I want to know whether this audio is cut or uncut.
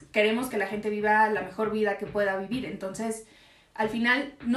uncut